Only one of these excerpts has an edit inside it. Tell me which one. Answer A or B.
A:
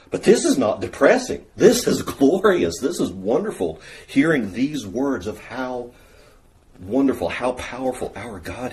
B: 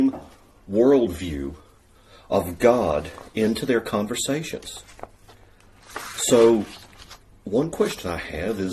A